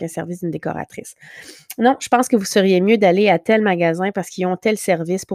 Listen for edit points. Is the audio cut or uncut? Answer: uncut